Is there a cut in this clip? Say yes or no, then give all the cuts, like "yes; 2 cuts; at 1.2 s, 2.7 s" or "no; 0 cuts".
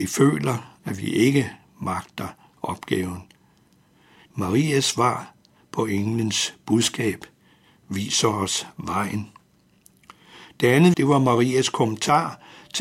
yes; 2 cuts; at 4.3 s, 10.9 s